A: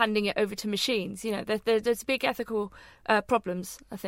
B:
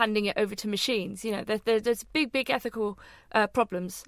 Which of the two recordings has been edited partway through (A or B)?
A